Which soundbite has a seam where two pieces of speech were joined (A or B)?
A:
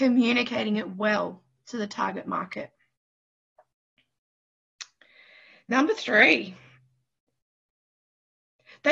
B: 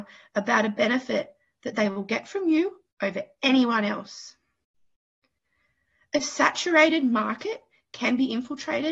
B